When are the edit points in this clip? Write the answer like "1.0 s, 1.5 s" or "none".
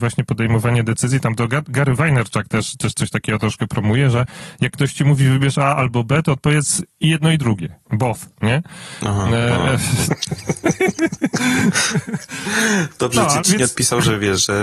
10.1 s, 13.4 s

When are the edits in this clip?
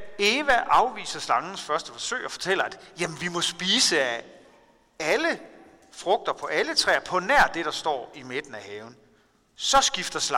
none

